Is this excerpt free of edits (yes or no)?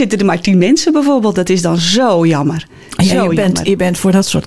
yes